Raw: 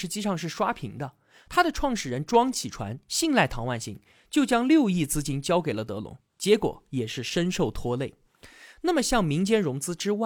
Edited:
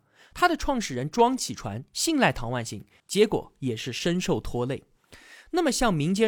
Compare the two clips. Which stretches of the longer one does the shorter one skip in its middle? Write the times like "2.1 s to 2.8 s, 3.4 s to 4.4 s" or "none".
4.2 s to 6.3 s